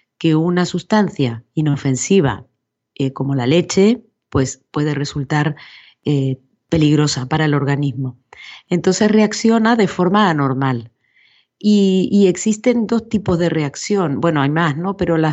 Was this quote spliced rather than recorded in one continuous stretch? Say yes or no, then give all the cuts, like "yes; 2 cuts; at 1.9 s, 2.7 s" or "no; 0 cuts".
no; 0 cuts